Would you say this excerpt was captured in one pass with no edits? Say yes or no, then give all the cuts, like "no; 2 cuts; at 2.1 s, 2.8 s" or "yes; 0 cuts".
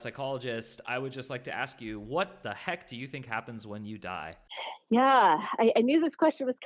yes; 0 cuts